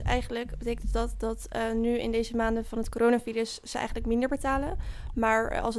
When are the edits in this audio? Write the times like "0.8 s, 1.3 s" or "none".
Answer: none